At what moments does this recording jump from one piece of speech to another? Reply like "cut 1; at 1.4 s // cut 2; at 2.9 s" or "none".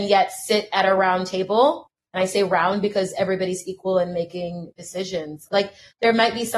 cut 1; at 5.5 s